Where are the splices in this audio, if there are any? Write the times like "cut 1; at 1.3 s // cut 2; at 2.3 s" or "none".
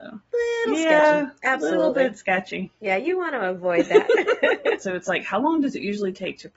cut 1; at 4.8 s